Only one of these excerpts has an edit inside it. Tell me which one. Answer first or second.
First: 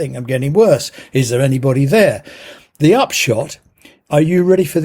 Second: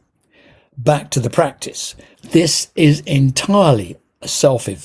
second